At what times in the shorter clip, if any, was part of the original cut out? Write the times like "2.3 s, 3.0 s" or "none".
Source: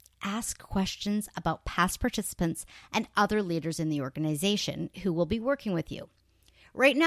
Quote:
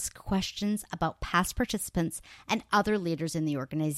none